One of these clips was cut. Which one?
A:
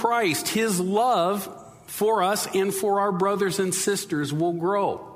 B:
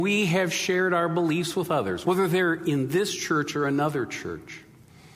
B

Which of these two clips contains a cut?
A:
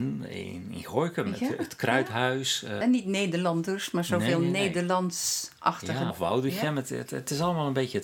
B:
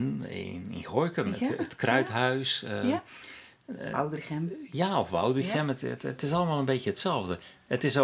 A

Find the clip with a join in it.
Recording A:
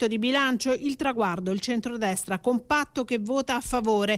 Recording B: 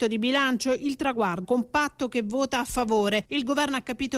B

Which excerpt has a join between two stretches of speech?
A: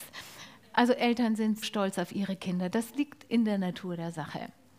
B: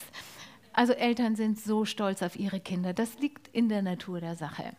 A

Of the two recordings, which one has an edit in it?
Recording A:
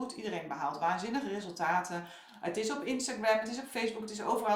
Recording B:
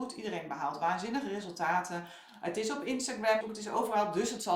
B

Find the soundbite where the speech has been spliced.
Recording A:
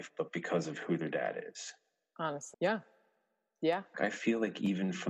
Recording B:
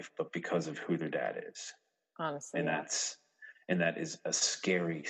A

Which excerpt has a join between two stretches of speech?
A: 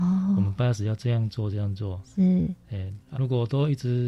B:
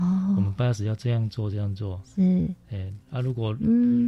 A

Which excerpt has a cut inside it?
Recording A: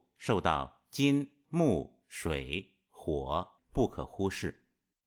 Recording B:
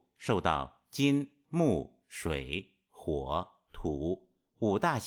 A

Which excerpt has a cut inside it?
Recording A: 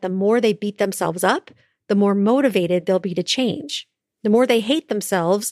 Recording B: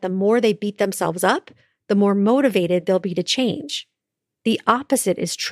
A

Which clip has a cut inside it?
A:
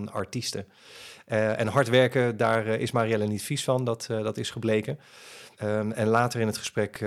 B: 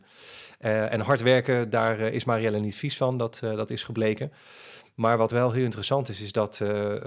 A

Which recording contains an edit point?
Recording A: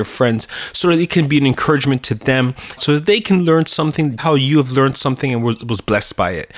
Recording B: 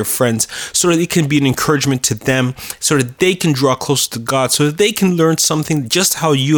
A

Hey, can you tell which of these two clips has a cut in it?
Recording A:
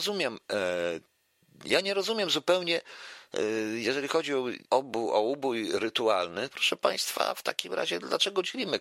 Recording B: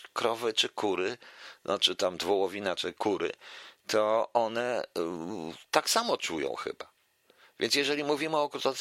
A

